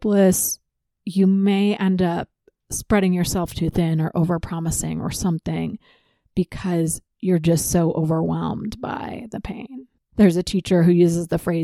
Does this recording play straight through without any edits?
no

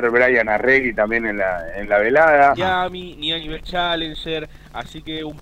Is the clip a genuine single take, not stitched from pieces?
no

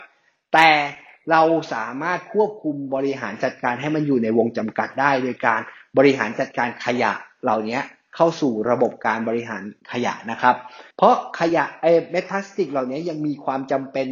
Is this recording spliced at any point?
yes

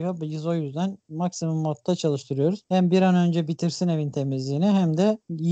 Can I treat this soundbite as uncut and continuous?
yes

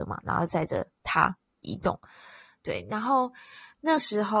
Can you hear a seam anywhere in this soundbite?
no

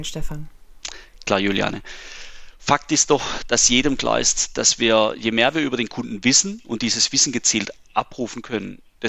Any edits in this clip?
no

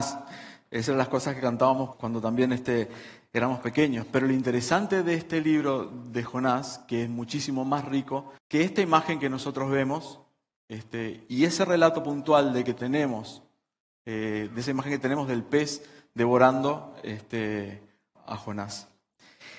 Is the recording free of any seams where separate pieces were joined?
no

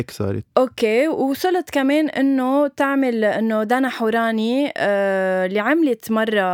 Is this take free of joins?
yes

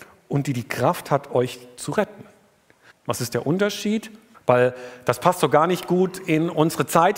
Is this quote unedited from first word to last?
no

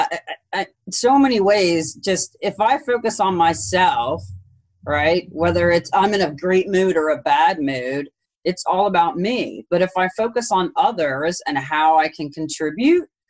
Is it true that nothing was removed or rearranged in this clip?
yes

